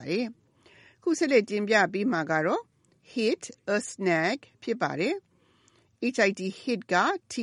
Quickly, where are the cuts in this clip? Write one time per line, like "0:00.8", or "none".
none